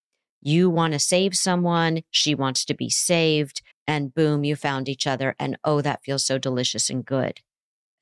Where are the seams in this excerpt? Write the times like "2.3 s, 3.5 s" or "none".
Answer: 3.7 s